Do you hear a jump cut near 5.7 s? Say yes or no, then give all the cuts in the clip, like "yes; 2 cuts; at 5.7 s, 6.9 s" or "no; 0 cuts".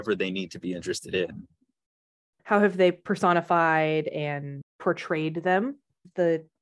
no; 1 cut; at 2.3 s